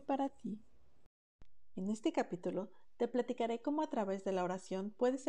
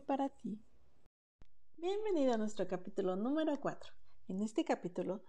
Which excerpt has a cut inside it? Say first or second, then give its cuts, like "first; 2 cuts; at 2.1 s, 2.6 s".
first; 1 cut; at 1.7 s